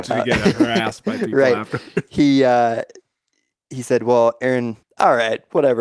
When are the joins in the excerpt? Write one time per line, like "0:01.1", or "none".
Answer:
0:04.8